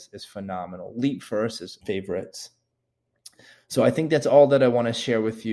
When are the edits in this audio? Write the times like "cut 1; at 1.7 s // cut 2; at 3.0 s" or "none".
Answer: cut 1; at 1.8 s